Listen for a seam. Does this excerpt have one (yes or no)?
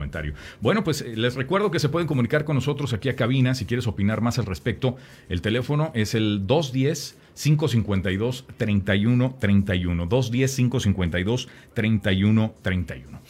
no